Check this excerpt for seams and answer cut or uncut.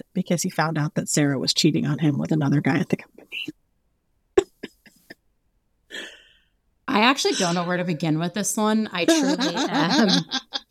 uncut